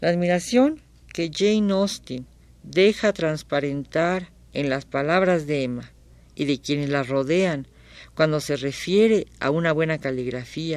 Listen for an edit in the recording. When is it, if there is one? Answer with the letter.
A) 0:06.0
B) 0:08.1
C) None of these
C